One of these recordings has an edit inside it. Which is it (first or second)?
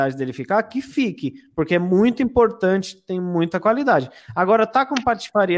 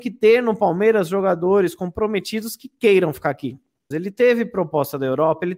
second